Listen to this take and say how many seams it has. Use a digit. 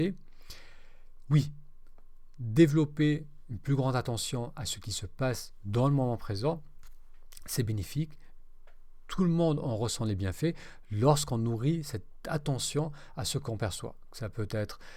0